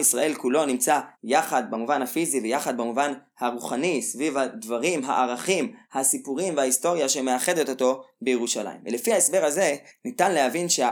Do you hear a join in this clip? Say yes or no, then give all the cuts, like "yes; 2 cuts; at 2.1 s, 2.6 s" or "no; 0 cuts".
yes; 2 cuts; at 1.1 s, 5.8 s